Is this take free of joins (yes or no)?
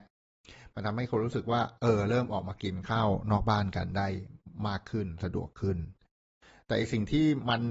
yes